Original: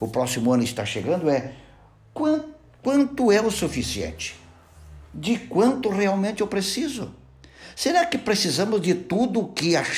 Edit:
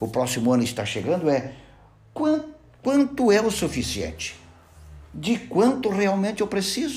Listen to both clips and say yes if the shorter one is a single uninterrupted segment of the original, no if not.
yes